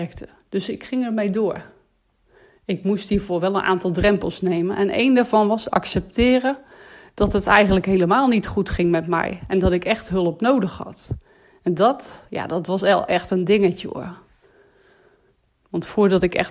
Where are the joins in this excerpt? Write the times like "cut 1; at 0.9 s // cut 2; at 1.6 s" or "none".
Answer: none